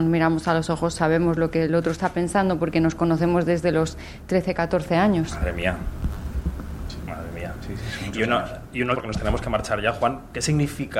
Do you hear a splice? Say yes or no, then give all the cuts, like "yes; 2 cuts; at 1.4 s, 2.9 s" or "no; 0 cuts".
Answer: yes; 1 cut; at 8.9 s